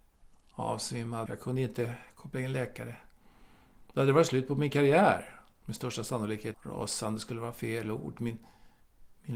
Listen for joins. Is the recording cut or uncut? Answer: cut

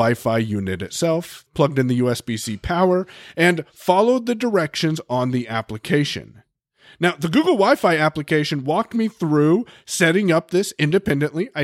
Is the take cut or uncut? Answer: uncut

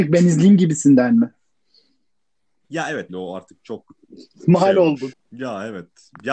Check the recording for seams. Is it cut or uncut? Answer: cut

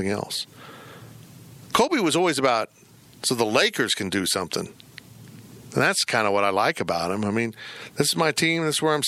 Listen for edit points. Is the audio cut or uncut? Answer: uncut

